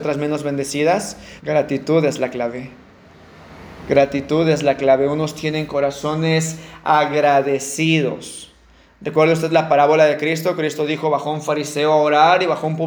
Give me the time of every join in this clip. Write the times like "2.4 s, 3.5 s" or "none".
1.4 s